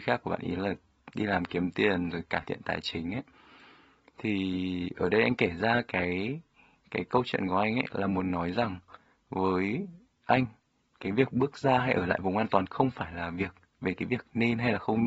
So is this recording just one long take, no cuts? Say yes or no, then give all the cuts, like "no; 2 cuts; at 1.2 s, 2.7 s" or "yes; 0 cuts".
yes; 0 cuts